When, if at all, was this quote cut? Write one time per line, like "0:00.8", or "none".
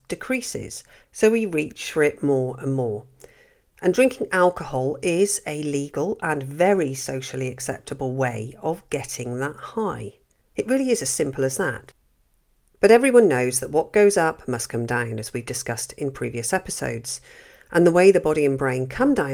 none